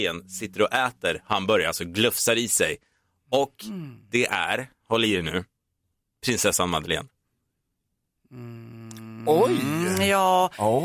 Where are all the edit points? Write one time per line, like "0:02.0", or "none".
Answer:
none